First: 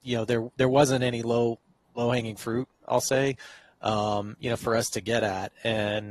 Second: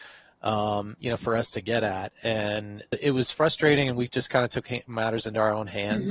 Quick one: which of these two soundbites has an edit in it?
second; 1 cut; at 2.9 s

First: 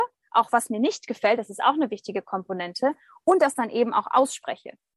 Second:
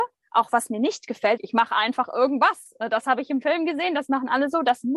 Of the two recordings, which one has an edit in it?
second; 1 cut; at 1.4 s

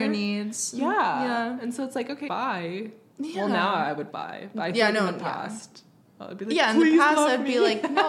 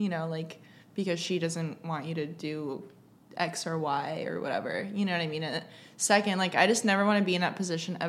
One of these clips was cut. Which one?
first; 2 cuts; at 2.3 s, 4.1 s

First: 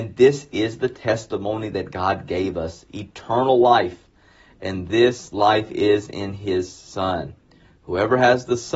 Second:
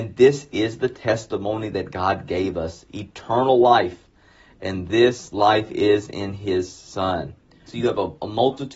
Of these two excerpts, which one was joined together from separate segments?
second; 1 cut; at 7.7 s

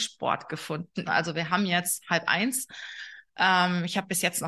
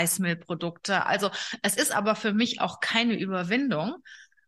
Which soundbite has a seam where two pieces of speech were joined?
first; 1 cut; at 1.1 s

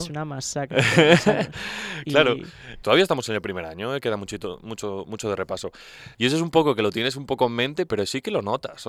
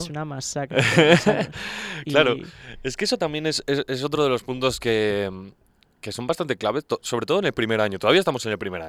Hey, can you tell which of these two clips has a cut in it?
first; 3 cuts; at 2.8 s, 6.1 s, 7.9 s

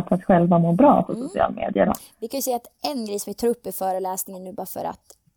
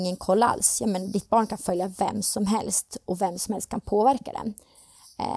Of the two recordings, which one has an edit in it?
first; 1 cut; at 1.9 s

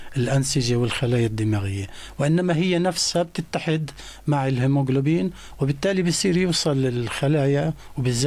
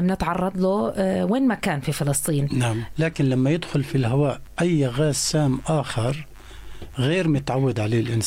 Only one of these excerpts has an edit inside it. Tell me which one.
second; 1 cut; at 2.9 s

